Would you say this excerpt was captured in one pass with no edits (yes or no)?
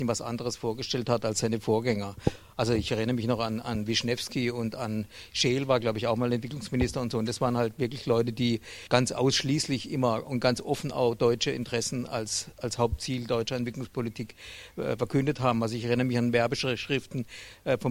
yes